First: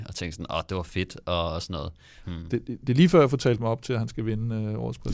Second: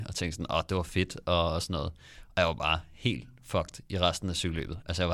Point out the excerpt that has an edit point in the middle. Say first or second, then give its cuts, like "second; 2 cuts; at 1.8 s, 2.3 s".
first; 1 cut; at 2.2 s